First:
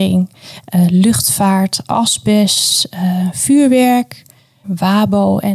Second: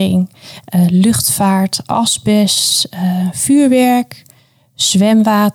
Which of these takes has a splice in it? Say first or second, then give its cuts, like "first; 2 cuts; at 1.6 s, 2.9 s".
first; 1 cut; at 4.6 s